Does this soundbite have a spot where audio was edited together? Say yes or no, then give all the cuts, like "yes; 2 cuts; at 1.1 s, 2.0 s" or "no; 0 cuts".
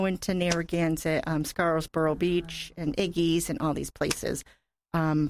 no; 0 cuts